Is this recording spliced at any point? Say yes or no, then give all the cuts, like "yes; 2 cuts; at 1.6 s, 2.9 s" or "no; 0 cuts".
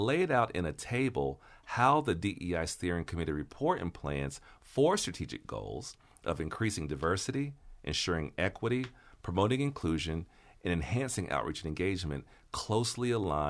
no; 0 cuts